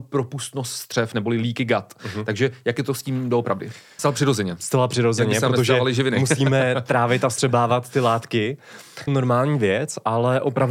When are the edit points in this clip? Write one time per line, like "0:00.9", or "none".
0:04.0
0:09.1